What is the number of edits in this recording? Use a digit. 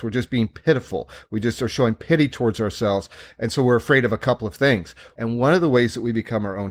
1